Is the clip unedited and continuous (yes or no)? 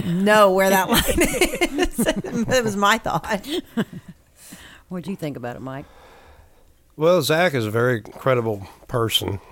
no